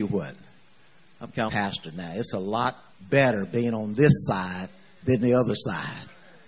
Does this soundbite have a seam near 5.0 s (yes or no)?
no